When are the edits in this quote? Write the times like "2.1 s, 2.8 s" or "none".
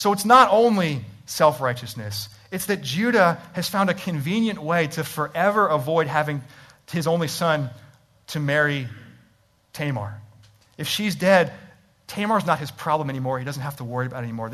none